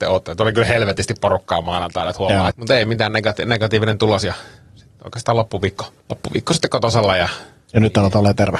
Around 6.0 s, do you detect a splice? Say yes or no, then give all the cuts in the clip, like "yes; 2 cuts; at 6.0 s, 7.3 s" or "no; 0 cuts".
yes; 2 cuts; at 2.5 s, 6.0 s